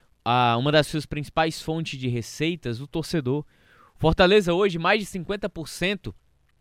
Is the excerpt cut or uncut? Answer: uncut